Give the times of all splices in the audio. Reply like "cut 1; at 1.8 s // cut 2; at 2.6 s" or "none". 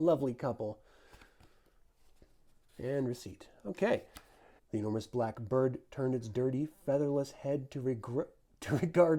cut 1; at 4.6 s